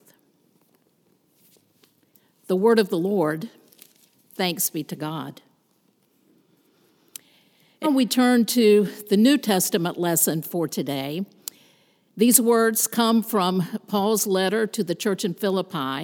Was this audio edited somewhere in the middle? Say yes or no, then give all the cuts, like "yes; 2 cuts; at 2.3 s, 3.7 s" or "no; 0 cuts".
yes; 1 cut; at 7.8 s